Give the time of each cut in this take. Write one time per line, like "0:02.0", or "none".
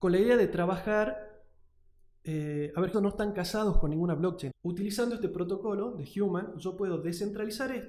0:02.9
0:04.5

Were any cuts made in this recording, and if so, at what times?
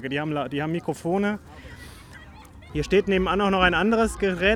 0:02.7

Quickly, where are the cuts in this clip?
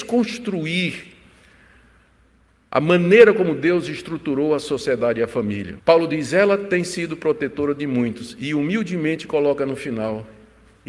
0:05.8

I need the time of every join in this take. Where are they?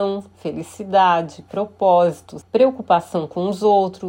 0:02.4

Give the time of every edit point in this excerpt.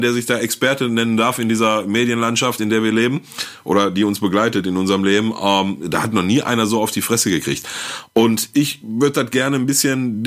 none

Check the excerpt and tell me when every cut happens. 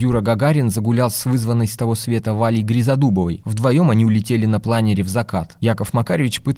none

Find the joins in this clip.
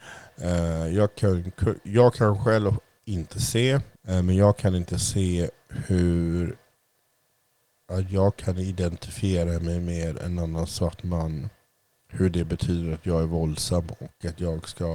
0:04.0

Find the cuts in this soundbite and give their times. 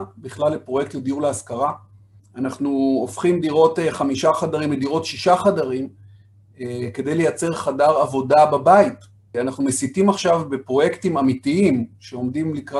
0:02.2
0:09.3

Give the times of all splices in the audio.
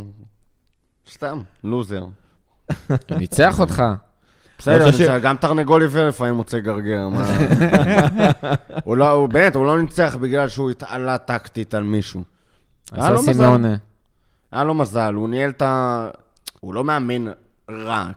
0:16.6

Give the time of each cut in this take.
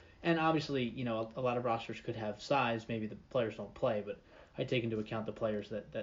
none

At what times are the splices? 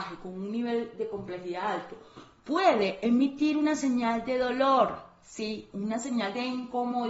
none

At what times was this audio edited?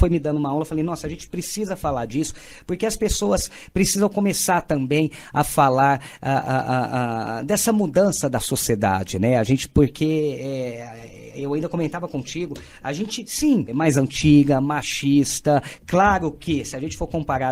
0:13.7

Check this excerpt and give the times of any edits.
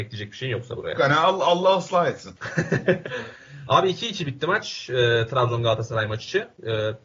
0:00.9
0:03.0

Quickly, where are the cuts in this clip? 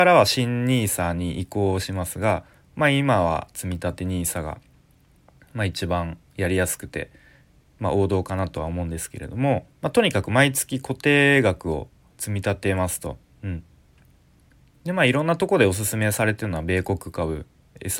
0:09.7

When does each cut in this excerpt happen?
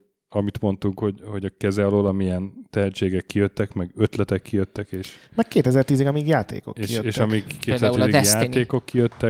none

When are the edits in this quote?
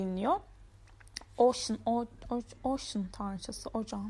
none

